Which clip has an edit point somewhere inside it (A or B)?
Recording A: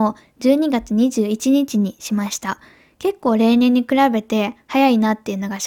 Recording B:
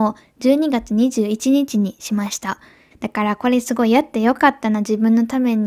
B